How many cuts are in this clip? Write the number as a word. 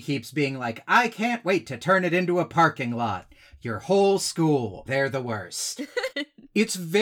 two